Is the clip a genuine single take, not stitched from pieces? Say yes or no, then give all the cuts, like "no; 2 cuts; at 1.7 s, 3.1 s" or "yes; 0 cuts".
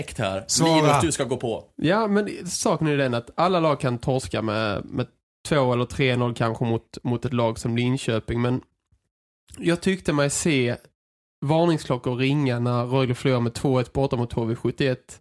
yes; 0 cuts